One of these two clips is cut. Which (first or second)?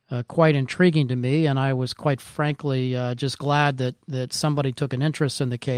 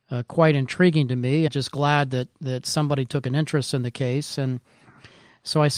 second